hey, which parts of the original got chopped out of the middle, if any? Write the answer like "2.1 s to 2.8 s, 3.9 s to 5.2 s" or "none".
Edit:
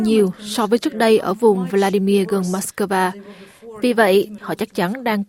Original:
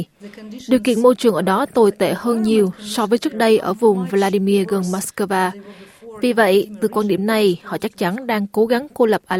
6.8 s to 7.6 s